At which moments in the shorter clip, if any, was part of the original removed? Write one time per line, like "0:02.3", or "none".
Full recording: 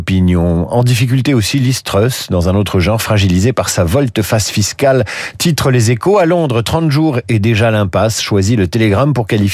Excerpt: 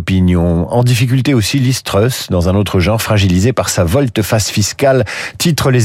none